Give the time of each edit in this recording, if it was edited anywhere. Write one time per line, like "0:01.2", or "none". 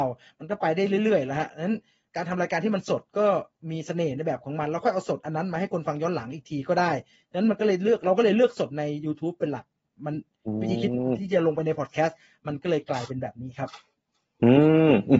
none

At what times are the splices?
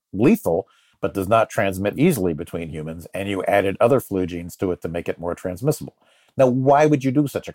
0:01.9

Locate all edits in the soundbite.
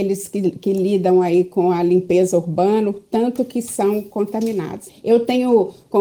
0:04.9

